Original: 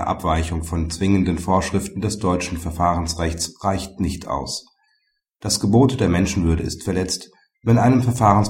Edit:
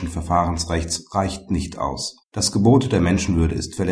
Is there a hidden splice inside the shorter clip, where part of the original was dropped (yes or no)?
yes